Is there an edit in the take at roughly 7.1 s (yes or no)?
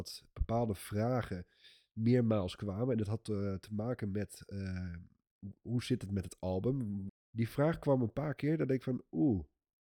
yes